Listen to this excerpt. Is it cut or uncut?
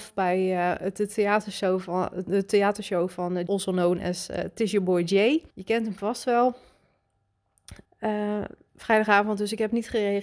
cut